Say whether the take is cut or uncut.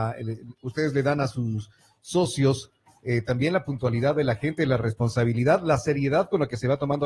uncut